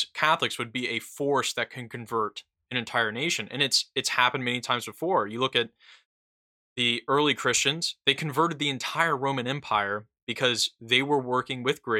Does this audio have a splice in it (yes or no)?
no